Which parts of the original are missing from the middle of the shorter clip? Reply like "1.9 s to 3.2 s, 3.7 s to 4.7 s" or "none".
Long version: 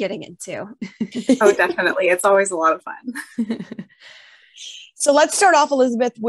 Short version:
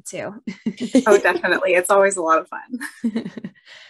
none